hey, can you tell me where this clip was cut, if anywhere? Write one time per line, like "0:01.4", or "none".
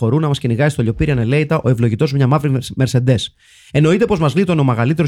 none